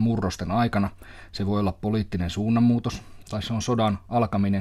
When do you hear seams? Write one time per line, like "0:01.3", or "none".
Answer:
0:03.2